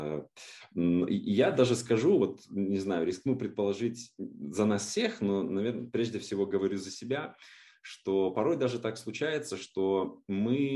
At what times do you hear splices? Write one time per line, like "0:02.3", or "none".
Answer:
none